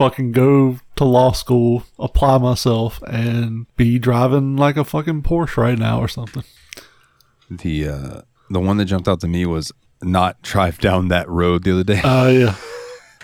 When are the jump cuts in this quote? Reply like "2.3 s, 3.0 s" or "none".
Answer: 3.7 s